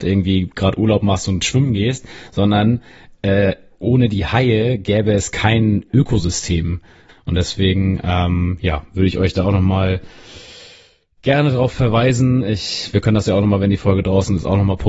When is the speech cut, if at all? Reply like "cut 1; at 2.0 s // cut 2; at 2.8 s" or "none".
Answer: cut 1; at 7.1 s